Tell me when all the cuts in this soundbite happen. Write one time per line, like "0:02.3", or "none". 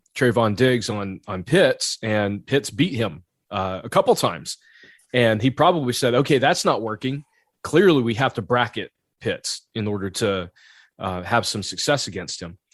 none